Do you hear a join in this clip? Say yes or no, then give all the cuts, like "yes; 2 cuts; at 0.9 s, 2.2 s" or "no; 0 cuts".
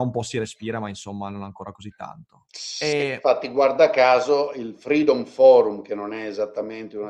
no; 0 cuts